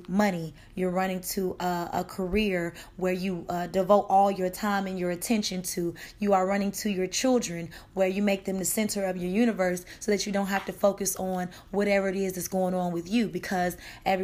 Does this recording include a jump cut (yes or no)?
no